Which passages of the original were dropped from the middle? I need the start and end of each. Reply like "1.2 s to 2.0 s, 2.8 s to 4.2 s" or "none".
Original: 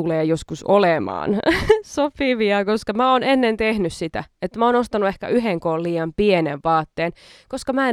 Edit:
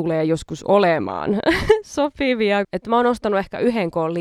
2.6 s to 4.3 s